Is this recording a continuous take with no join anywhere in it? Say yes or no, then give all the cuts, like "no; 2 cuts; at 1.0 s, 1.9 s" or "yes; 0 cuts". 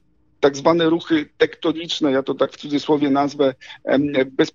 yes; 0 cuts